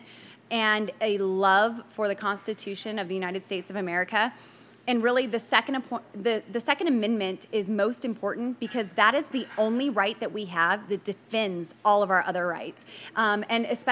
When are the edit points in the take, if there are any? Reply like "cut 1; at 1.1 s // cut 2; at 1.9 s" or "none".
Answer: none